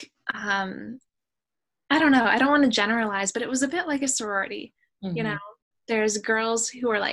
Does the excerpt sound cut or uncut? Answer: uncut